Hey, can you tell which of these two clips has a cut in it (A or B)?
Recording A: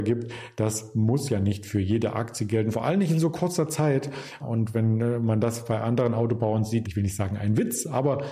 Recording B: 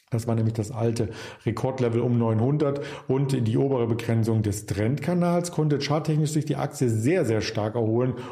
A